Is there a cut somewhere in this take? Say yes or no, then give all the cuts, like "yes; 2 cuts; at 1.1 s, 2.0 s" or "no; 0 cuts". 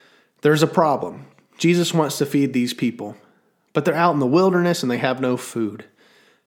no; 0 cuts